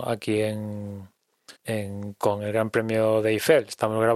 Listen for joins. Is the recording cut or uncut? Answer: cut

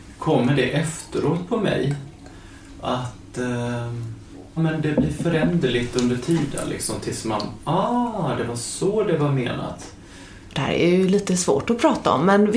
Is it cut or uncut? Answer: cut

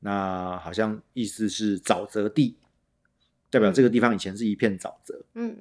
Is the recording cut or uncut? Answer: uncut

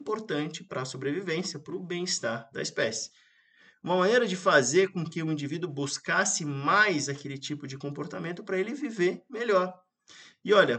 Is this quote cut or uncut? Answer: uncut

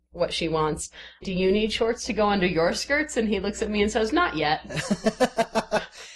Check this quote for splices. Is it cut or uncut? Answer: cut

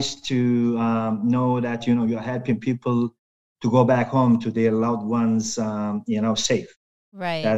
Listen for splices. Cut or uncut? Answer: uncut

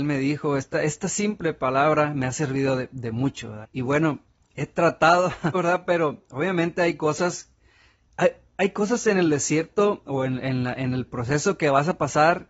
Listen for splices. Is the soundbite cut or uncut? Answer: cut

